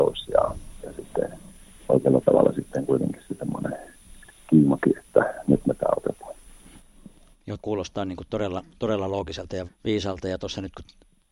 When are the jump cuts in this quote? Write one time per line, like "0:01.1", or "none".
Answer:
0:07.6
0:09.6